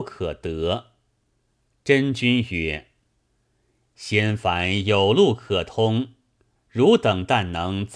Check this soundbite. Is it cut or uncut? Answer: uncut